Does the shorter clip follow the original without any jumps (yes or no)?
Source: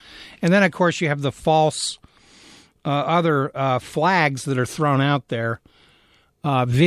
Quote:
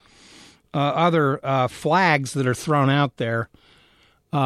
yes